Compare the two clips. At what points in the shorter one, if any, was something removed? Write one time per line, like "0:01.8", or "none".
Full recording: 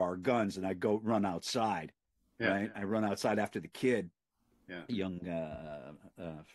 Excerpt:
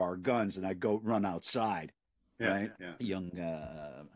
0:02.7

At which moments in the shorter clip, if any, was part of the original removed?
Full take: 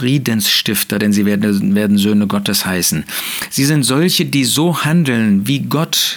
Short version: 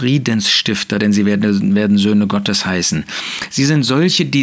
none

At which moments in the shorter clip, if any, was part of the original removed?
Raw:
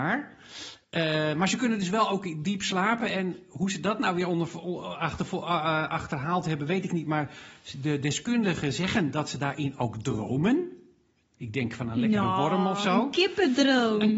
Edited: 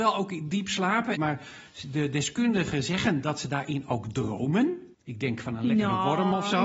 0:01.2
0:04.9

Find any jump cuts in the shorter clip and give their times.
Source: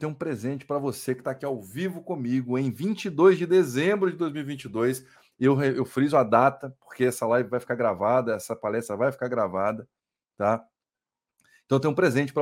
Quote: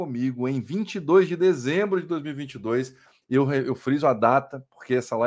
none

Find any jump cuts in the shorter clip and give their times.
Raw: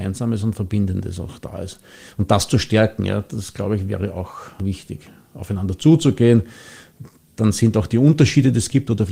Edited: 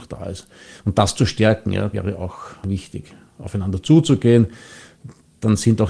0:01.9

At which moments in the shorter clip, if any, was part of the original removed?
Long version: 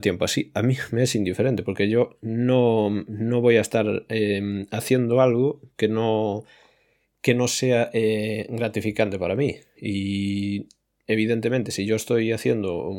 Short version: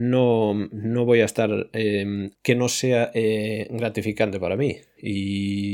0:02.3

